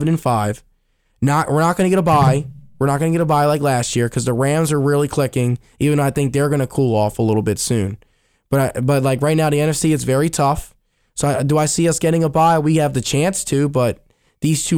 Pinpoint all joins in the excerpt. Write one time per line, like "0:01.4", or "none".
none